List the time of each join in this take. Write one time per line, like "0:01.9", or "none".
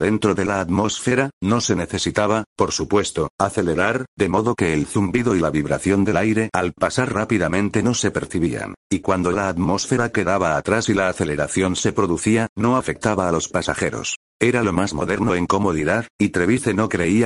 0:08.8
0:12.5